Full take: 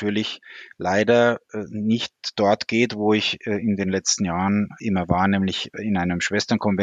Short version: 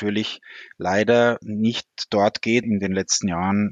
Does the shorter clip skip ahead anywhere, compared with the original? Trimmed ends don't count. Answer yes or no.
yes